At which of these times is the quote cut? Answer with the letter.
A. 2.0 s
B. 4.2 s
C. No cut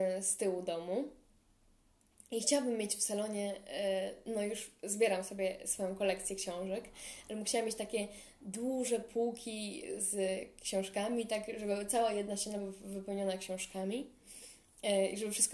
C